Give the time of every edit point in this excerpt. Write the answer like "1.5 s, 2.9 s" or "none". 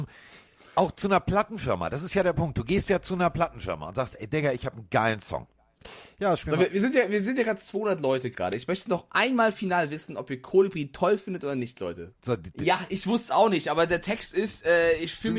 12.1 s